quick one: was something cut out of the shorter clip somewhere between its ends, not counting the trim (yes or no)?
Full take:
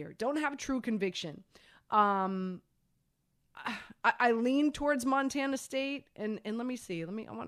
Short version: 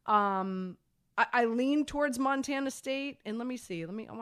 yes